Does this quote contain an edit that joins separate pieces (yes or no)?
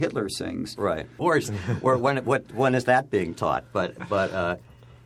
yes